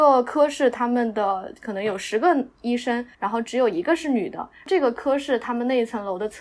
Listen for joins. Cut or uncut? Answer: cut